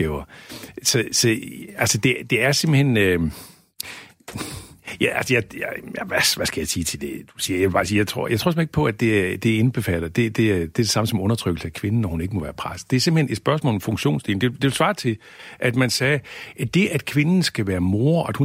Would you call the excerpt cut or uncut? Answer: uncut